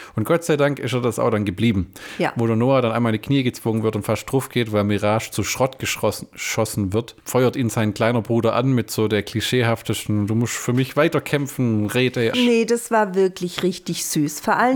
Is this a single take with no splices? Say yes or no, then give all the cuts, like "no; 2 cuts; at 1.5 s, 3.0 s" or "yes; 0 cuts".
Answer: no; 1 cut; at 12.3 s